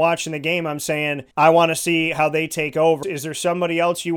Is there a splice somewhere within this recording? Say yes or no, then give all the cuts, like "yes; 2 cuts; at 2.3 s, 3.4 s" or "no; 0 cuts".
yes; 2 cuts; at 1.3 s, 3.0 s